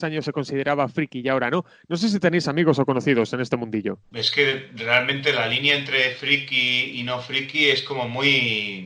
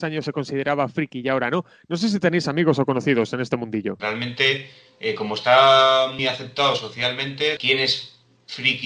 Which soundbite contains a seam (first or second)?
second